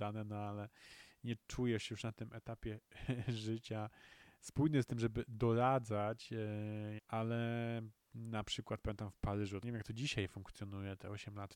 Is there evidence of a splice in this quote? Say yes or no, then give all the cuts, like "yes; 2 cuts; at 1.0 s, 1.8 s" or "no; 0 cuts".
yes; 2 cuts; at 7.0 s, 9.6 s